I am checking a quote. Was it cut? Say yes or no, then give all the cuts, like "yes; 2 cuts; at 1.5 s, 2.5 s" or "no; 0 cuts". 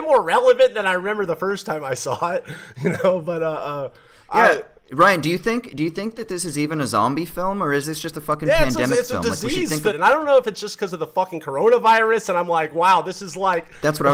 yes; 1 cut; at 9.9 s